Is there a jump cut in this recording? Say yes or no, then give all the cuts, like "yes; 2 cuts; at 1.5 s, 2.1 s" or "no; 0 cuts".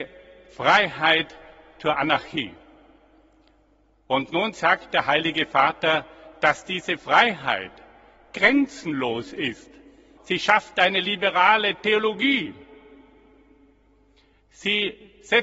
yes; 1 cut; at 10.2 s